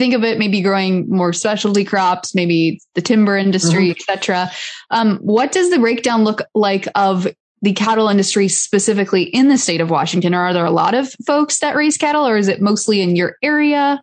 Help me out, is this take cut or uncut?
uncut